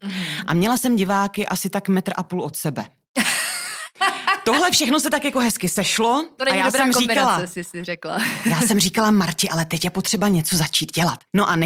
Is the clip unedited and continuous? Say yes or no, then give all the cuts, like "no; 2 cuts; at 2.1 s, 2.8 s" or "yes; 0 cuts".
yes; 0 cuts